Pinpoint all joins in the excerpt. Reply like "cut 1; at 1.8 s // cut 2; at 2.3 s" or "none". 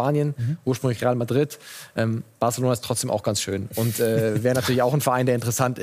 none